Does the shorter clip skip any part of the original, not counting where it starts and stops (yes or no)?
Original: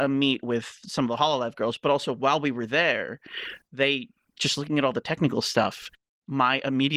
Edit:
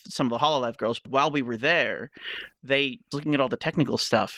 yes